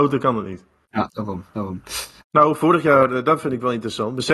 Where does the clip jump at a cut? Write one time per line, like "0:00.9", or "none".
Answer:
0:02.2